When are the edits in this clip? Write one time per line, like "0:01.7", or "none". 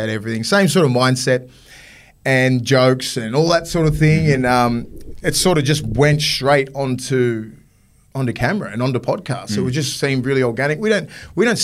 none